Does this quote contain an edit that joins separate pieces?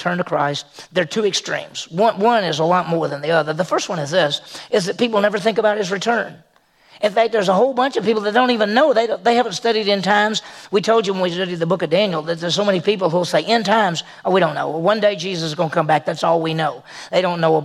no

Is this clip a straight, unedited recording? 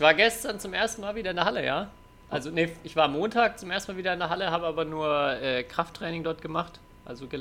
yes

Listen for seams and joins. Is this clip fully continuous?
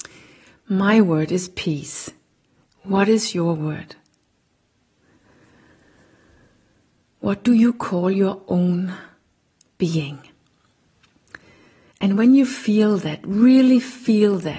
yes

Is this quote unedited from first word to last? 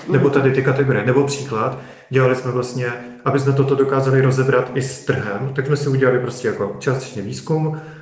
yes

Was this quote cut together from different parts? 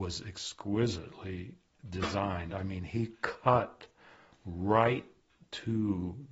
no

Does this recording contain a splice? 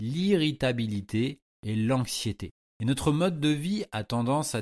no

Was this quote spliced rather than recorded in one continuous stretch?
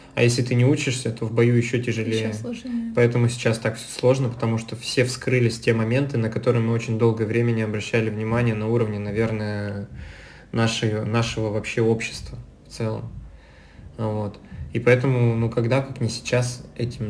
no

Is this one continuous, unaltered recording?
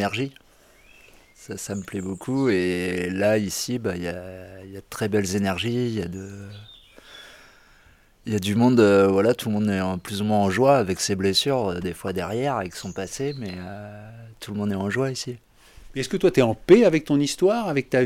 yes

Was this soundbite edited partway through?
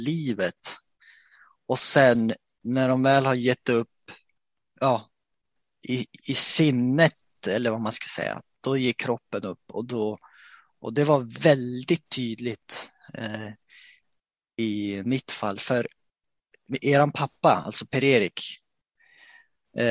no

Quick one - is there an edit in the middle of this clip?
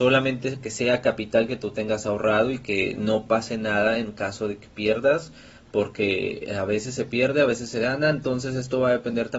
no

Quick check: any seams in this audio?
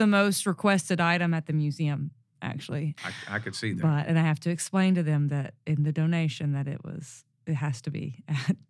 yes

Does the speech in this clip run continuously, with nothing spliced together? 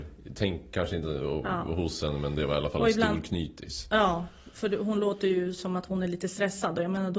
yes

